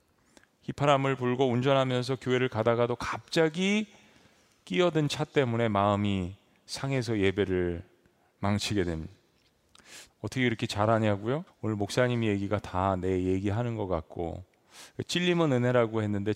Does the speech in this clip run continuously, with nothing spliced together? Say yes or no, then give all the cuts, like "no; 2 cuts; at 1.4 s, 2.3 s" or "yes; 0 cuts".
no; 2 cuts; at 10.1 s, 11.5 s